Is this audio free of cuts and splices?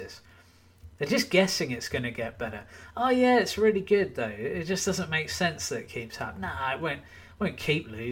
yes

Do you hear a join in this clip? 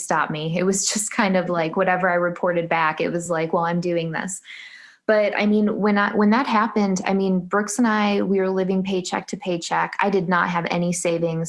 no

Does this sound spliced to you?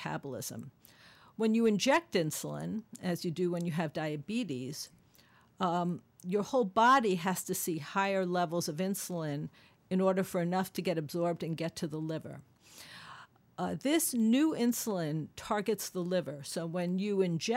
no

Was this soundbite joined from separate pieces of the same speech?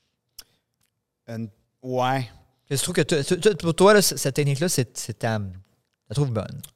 no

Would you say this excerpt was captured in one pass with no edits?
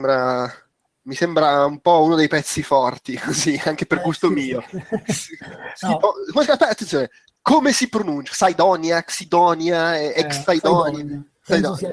yes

